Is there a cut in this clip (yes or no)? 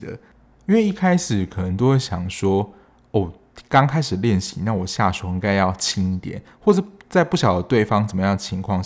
no